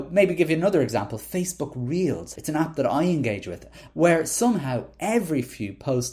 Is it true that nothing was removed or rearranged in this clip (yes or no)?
no